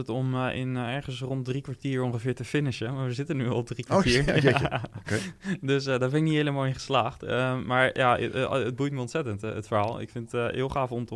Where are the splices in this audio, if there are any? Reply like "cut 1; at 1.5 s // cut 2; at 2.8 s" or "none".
none